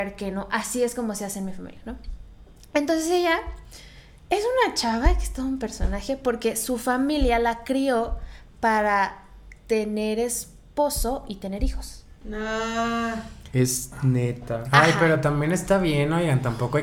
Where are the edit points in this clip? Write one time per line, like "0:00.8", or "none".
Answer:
0:12.2